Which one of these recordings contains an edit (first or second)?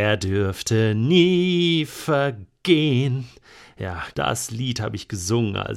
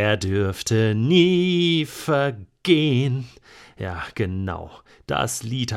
first